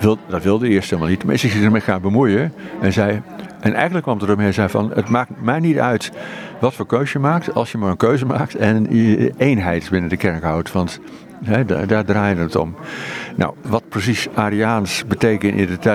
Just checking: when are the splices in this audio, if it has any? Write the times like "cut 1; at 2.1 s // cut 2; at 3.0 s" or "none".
none